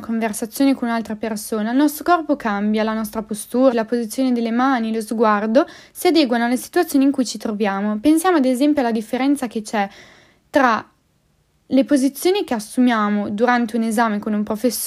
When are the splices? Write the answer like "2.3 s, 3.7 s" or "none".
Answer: 3.7 s